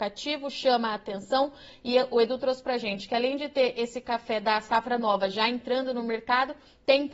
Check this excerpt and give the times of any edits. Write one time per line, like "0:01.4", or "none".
none